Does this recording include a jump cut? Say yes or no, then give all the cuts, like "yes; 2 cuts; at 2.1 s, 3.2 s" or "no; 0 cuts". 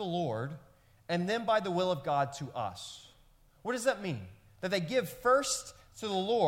no; 0 cuts